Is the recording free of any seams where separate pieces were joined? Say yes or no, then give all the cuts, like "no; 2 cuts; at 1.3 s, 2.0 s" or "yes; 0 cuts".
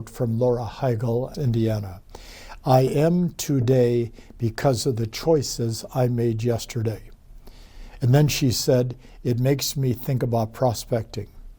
no; 1 cut; at 1.3 s